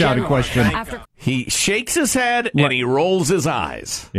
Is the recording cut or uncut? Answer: cut